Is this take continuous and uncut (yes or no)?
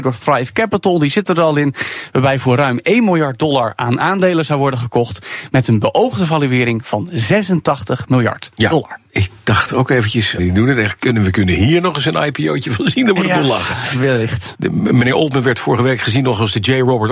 no